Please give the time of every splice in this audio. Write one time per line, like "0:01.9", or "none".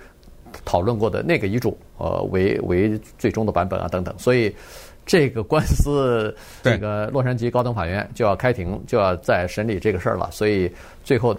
0:06.6